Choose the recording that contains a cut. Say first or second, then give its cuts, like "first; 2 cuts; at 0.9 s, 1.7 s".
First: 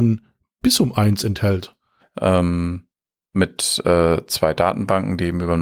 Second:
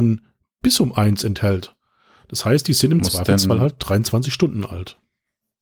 first; 1 cut; at 2.0 s